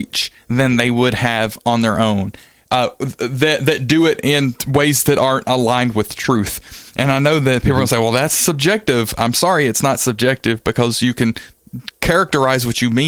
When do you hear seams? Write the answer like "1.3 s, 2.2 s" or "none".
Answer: none